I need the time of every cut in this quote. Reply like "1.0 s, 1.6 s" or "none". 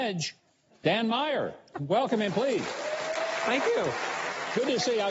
none